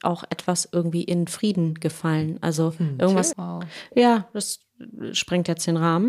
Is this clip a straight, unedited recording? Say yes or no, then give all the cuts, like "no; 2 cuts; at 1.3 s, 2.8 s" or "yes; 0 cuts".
no; 1 cut; at 3.3 s